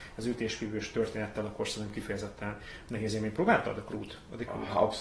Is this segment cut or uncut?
uncut